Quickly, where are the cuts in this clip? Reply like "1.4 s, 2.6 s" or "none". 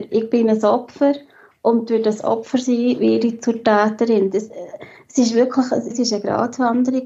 5.9 s